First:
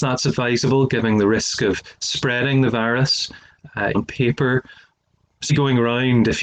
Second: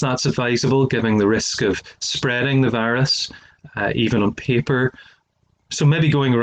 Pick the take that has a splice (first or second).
first